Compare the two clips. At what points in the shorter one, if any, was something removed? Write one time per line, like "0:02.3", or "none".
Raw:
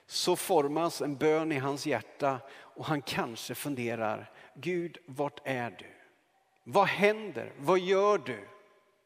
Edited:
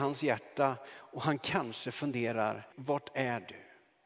0:02.7